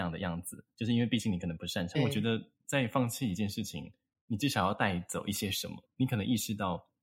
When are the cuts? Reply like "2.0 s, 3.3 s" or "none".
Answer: 1.9 s, 5.8 s

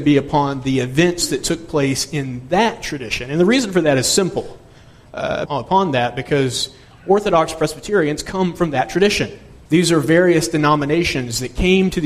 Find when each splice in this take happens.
5.5 s, 9.7 s

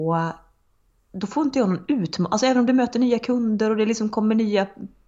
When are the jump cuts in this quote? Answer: none

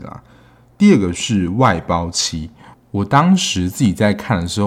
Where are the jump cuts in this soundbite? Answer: 2.7 s

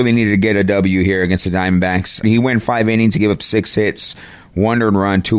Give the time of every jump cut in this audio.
2.2 s

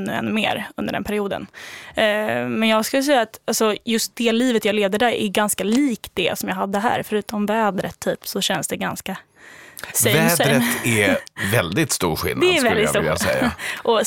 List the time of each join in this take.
none

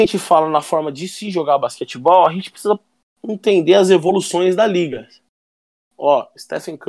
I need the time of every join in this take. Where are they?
5.8 s

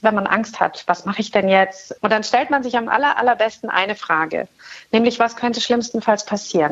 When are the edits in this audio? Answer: 2.0 s

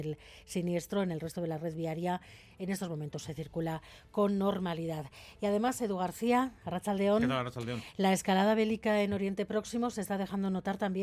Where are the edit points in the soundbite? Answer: none

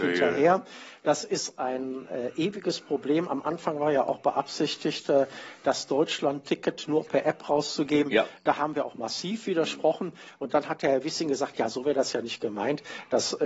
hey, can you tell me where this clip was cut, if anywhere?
none

